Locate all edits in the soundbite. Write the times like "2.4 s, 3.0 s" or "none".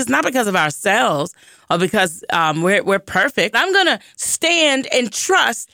3.5 s